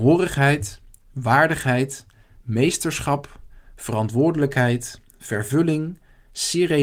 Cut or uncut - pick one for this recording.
uncut